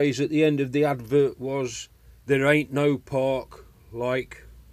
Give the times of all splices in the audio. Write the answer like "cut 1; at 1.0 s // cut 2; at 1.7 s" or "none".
none